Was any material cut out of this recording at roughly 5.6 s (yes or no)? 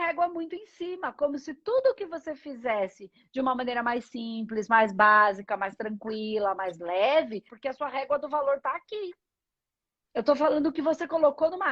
no